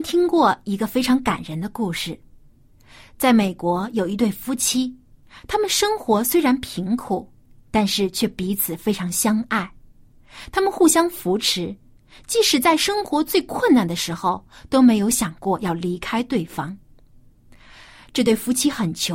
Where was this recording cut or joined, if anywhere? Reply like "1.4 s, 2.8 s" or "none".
none